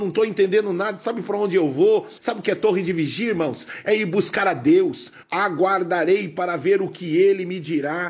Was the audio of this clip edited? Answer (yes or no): yes